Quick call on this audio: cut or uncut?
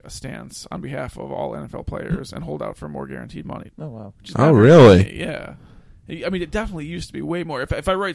cut